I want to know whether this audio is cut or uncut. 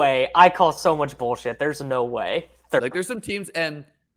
cut